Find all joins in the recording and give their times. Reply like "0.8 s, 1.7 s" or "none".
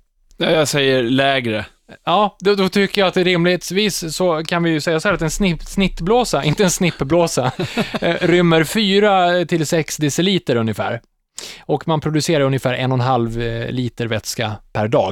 none